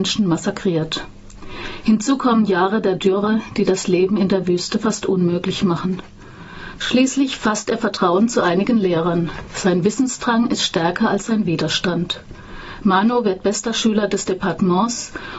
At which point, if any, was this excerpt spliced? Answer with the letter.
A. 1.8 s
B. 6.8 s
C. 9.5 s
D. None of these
B